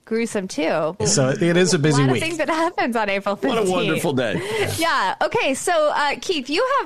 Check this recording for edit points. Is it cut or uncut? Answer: cut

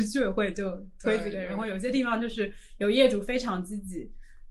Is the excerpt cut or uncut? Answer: uncut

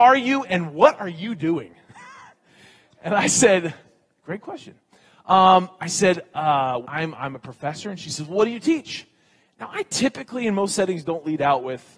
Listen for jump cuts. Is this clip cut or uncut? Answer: cut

